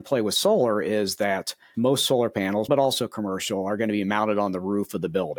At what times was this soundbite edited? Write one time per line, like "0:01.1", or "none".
0:02.7

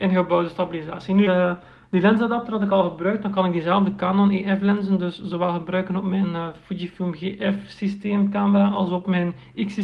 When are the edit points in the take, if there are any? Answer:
0:01.3

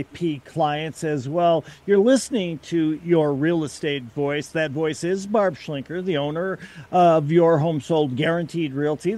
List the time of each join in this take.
none

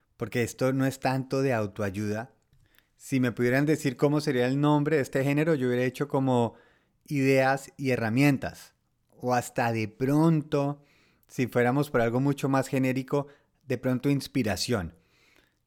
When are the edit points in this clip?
none

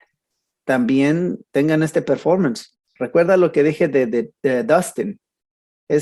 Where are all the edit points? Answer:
0:02.7

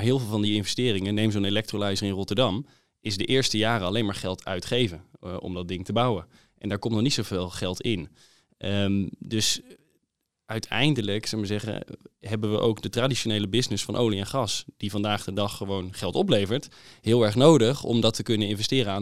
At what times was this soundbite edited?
none

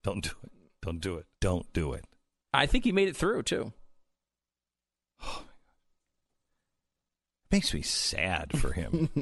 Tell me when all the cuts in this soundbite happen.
0:01.4

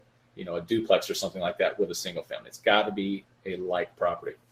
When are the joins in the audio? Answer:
none

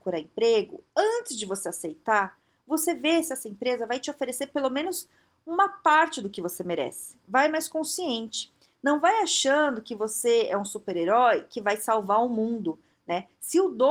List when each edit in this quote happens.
none

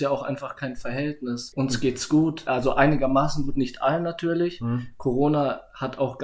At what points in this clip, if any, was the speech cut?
none

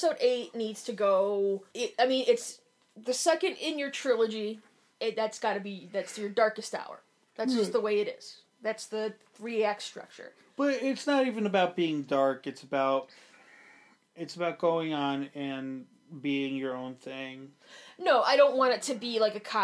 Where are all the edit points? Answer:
0:01.7

